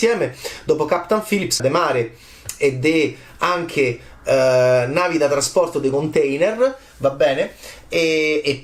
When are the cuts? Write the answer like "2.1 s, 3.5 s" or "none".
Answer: 1.6 s